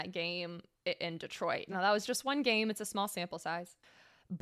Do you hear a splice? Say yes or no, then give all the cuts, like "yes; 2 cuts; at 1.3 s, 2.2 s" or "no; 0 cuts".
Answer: no; 0 cuts